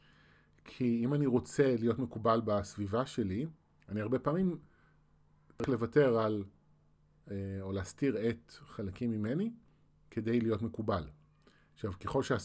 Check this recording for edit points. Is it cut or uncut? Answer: uncut